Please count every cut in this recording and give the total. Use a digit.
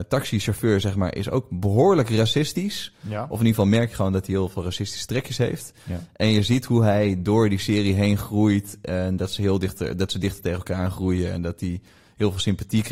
0